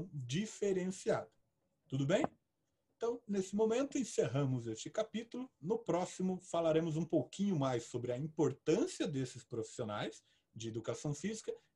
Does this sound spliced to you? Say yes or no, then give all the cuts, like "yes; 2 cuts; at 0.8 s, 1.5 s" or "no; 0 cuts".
no; 0 cuts